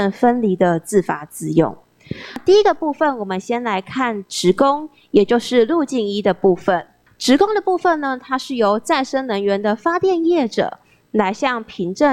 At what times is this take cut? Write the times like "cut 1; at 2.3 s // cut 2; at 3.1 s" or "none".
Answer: none